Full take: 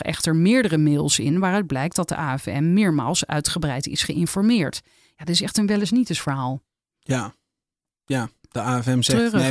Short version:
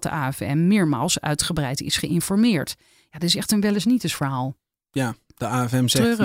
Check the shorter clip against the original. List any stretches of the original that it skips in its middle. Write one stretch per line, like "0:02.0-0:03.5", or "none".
0:06.8-0:07.9